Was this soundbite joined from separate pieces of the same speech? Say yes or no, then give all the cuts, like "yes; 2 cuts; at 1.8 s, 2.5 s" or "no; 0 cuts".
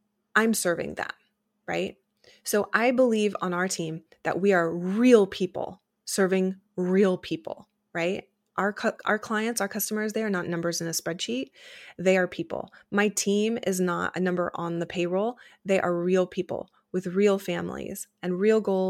no; 0 cuts